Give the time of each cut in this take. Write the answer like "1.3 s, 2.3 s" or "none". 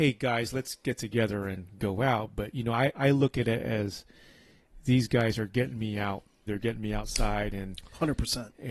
6.5 s